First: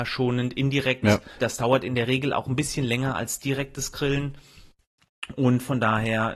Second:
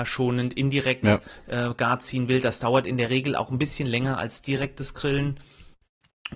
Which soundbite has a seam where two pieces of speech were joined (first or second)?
first